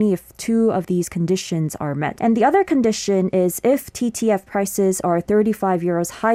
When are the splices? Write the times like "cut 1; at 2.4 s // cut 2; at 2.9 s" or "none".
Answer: cut 1; at 2.2 s